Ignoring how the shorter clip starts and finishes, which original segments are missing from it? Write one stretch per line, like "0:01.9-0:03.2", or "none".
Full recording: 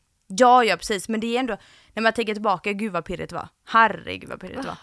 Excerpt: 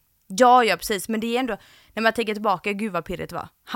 none